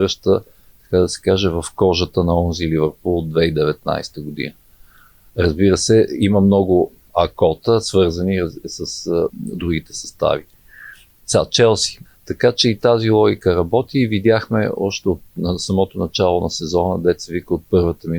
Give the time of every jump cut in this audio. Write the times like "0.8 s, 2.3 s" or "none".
9.3 s, 12.0 s